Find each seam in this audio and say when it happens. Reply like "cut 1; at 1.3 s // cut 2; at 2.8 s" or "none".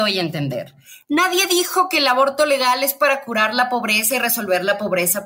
none